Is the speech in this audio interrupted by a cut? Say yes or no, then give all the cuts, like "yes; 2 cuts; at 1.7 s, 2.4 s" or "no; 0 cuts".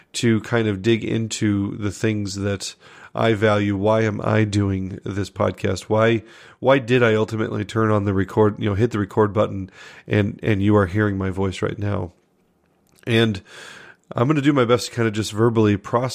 no; 0 cuts